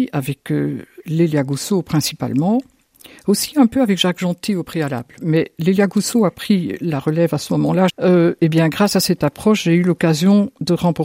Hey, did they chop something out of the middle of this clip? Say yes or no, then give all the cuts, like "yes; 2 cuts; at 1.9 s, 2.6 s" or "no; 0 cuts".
yes; 1 cut; at 7.9 s